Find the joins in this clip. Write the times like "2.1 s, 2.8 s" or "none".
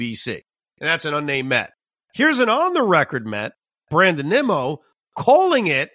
none